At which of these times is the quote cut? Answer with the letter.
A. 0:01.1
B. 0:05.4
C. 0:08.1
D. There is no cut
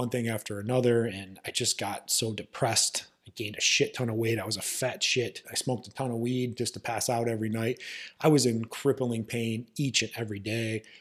B